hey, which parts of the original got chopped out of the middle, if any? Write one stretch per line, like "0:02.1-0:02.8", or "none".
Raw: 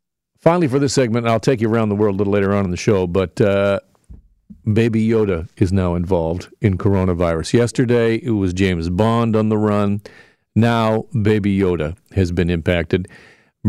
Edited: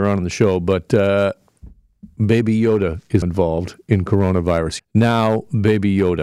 0:05.7-0:05.9
0:07.5-0:10.4

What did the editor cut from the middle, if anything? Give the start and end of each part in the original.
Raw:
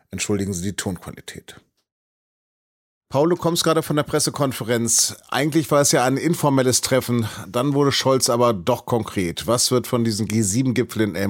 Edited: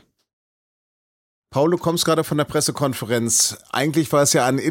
none

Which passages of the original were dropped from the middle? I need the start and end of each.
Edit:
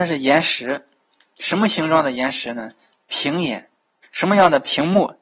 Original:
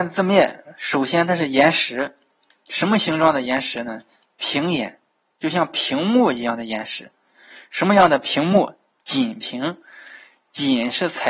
0:05.3-0:07.6

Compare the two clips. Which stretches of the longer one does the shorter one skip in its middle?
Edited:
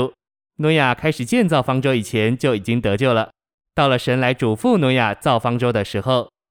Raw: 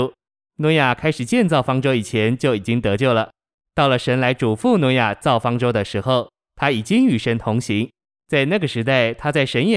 none

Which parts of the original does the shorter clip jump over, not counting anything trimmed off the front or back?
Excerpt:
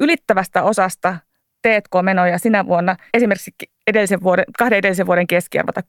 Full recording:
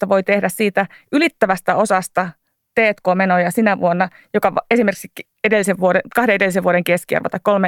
0:04.2-0:04.6

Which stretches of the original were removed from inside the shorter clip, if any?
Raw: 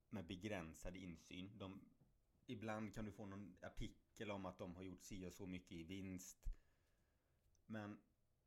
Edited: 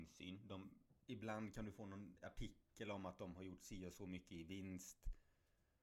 0:02.1-0:02.4

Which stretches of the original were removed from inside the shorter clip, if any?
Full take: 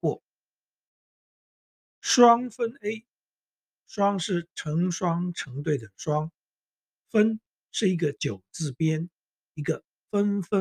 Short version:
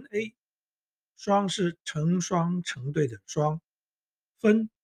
none

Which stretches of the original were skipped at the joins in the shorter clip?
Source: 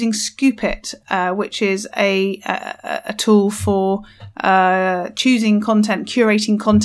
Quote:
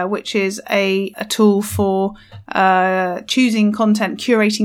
0:02.4-0:03.0

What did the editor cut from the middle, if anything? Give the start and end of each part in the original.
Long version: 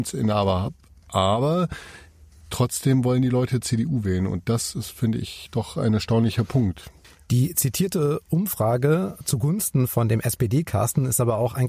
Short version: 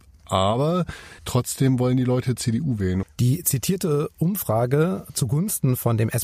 0:02.0-0:02.4
0:04.3-0:07.1

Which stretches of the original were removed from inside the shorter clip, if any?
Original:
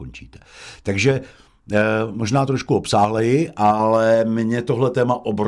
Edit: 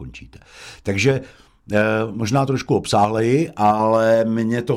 none

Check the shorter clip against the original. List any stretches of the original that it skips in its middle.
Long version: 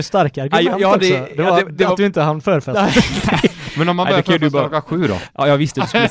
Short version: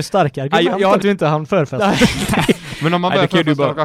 0:01.0-0:02.0

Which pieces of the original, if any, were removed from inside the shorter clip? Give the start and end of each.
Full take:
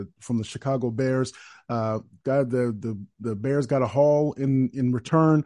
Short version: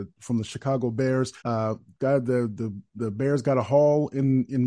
0:01.4-0:01.6

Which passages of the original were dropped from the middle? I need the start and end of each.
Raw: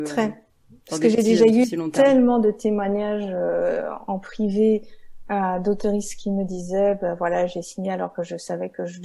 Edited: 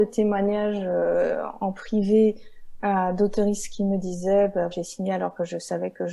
0:07.2-0:07.5

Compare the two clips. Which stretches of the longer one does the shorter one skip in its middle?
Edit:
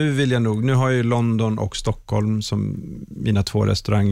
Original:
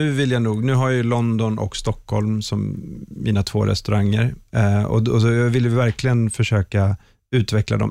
none

